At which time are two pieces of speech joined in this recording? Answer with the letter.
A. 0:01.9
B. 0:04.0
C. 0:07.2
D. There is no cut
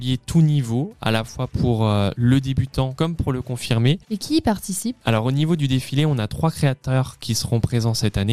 B